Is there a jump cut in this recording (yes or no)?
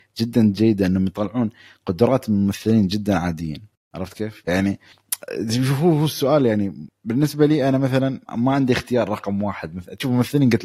yes